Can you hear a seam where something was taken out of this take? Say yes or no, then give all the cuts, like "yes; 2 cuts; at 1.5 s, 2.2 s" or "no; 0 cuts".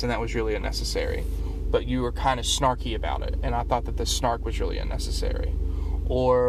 yes; 1 cut; at 1.6 s